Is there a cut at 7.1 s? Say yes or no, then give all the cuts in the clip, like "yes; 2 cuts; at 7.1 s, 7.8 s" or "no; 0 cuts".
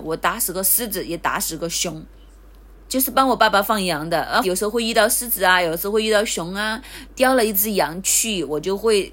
yes; 3 cuts; at 2.7 s, 4.4 s, 7.1 s